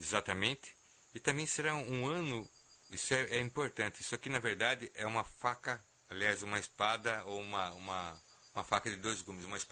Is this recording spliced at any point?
no; 0 cuts

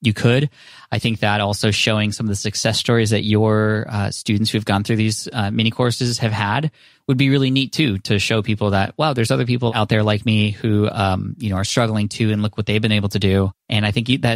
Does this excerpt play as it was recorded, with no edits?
yes; 0 cuts

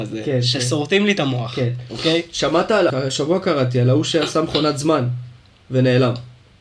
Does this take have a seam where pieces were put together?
yes; 1 cut; at 2.9 s

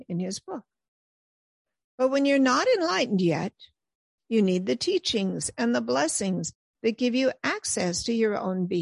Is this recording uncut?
yes; 0 cuts

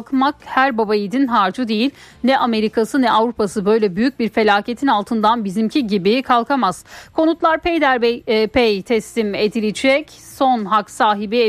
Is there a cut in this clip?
no; 0 cuts

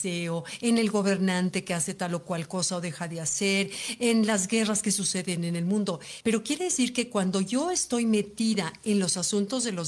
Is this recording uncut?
no; 1 cut; at 6.2 s

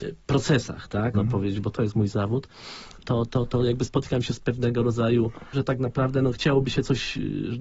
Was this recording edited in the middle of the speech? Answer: yes; 2 cuts; at 1.1 s, 5.5 s

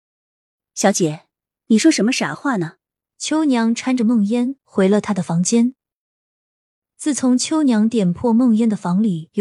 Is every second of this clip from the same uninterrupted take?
no; 1 cut; at 3.0 s

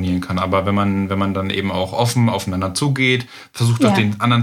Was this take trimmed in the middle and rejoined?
no; 0 cuts

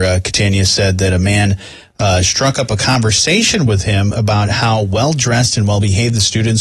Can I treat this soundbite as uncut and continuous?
yes; 0 cuts

